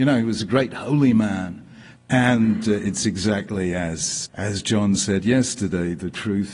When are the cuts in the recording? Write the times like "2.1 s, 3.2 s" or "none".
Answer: 2.0 s, 4.2 s